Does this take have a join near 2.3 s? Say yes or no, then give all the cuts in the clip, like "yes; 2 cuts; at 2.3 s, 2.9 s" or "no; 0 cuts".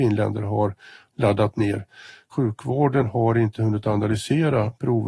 yes; 1 cut; at 2.3 s